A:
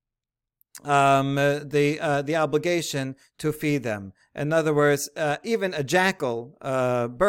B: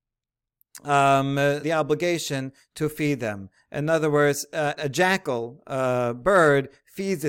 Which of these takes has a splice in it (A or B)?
B